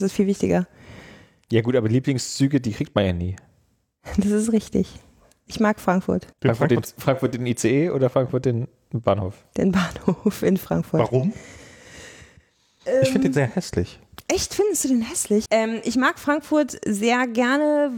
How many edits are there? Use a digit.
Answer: 2